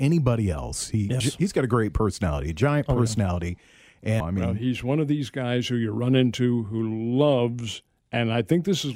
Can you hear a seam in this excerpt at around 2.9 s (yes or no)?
no